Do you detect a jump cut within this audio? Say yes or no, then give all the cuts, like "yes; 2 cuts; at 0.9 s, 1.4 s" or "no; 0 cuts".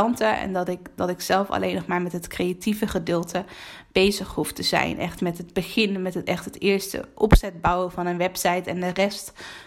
no; 0 cuts